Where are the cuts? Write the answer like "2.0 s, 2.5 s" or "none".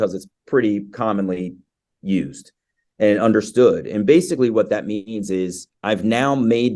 5.7 s